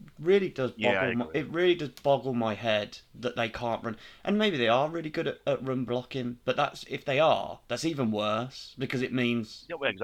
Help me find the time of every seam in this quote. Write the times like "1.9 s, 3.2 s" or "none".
none